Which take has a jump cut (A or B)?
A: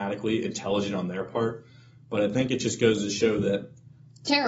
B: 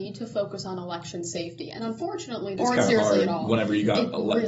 B